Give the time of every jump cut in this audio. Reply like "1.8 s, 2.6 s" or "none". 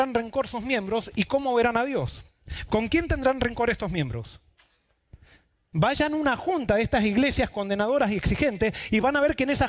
5.7 s